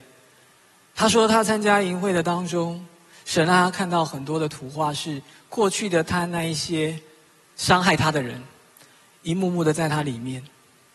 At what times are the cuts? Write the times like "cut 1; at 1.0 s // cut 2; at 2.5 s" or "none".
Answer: none